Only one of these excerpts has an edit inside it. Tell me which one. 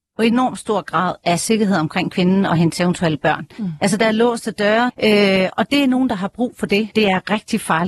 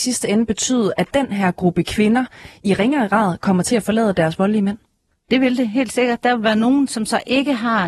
first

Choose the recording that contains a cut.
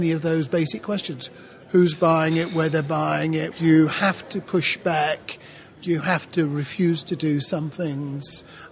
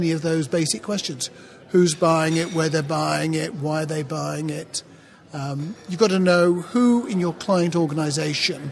first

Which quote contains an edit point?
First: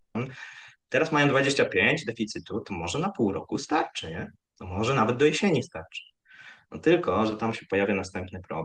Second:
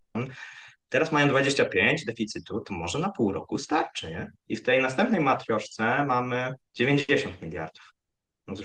second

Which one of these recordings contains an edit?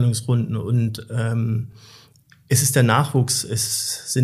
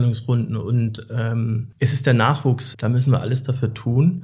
second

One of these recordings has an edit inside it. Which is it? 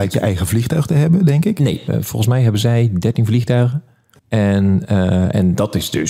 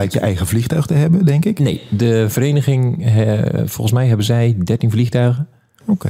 first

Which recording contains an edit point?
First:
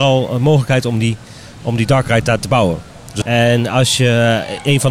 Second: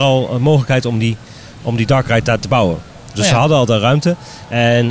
first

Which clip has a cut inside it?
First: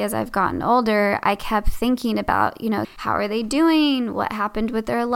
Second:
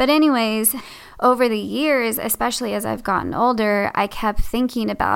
first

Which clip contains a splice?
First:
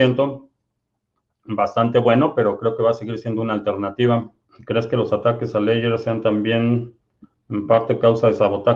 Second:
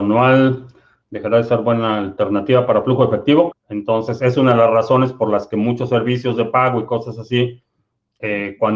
second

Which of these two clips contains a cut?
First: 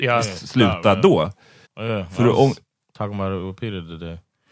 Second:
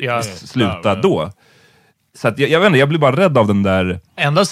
first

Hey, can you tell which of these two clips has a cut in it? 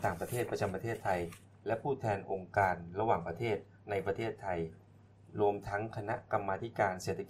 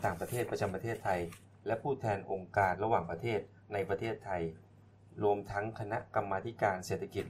second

